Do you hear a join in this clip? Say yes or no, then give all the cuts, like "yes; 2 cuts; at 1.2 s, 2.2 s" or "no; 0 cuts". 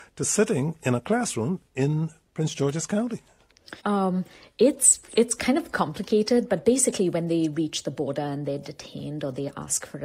yes; 1 cut; at 3.8 s